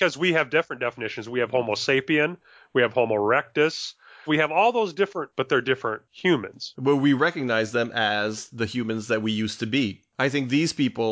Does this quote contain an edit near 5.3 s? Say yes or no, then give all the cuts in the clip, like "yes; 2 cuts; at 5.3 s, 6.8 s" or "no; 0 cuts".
yes; 2 cuts; at 4.2 s, 5.3 s